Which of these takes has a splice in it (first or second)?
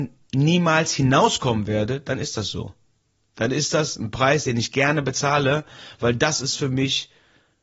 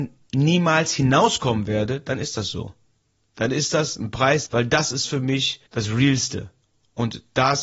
second